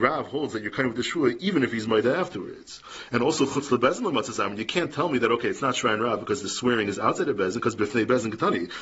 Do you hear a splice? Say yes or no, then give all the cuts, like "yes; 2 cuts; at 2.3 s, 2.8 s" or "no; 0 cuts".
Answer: no; 0 cuts